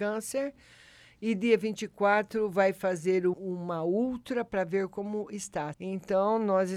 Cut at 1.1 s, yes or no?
no